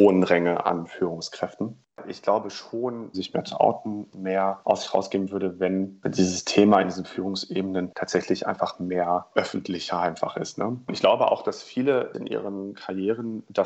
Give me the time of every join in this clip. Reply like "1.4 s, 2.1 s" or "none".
3.1 s, 9.3 s